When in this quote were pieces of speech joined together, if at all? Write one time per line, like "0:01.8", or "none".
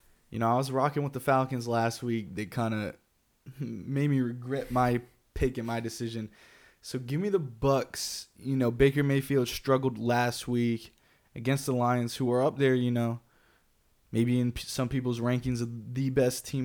none